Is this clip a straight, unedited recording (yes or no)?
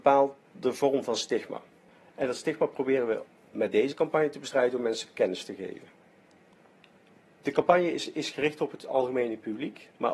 yes